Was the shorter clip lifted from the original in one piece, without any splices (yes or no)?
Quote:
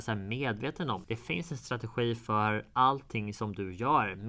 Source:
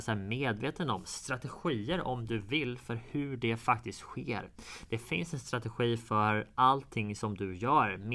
no